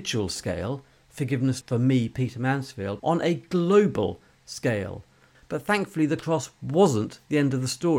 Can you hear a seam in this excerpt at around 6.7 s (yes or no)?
no